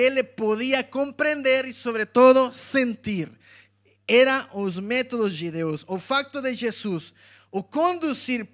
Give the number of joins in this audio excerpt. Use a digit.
0